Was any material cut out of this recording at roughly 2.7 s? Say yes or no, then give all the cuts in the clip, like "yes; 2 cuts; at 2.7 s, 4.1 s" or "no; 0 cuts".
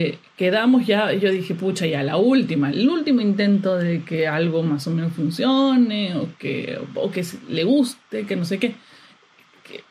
yes; 1 cut; at 2.7 s